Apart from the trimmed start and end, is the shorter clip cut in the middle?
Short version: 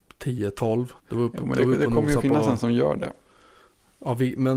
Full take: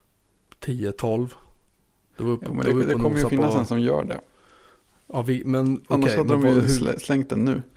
yes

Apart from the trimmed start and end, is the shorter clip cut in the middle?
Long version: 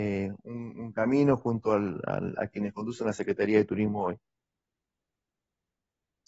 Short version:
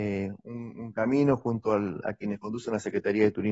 yes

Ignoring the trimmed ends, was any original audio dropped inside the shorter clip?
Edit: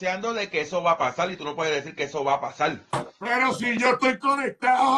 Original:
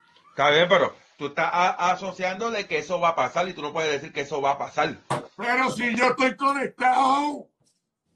no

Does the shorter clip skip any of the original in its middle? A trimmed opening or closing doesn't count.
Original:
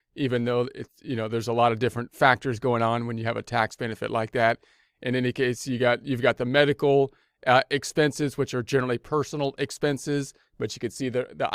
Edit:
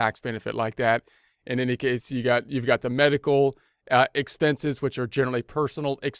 no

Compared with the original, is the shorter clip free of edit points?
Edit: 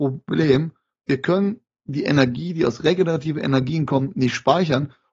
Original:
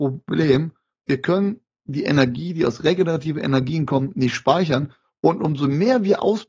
yes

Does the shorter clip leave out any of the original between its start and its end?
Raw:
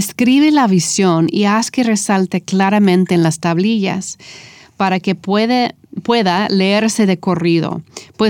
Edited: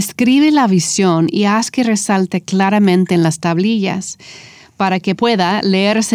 yes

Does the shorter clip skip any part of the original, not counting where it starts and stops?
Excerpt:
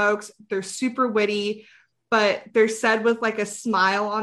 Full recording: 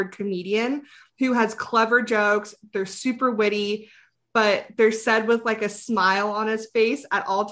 no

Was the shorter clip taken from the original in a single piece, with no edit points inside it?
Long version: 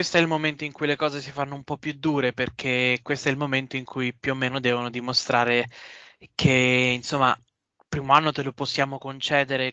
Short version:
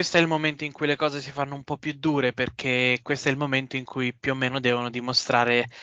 yes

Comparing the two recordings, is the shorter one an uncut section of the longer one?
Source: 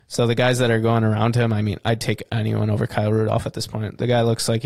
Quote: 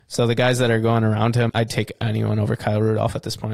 no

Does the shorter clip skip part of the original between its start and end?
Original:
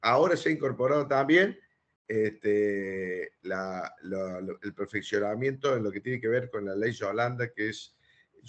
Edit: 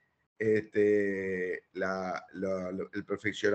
no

